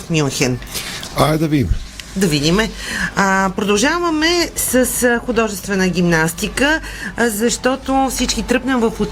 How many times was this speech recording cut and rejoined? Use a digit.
0